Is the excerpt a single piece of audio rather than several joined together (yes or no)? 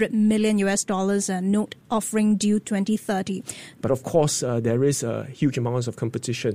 no